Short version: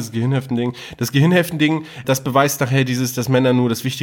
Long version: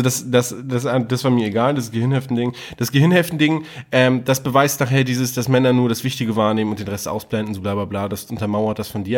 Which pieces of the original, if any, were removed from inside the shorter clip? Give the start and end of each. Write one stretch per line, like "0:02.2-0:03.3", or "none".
0:03.8-0:04.2